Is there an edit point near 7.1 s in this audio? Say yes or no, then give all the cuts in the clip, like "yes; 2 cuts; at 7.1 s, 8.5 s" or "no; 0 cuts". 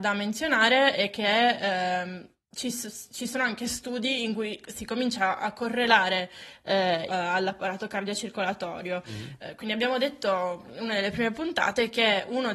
yes; 1 cut; at 7.1 s